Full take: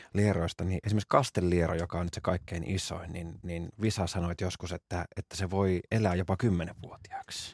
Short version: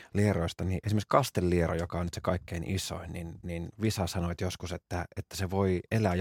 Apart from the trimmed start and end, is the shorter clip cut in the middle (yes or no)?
no